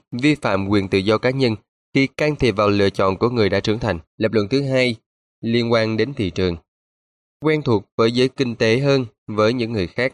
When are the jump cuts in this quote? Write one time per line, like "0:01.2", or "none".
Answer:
0:04.1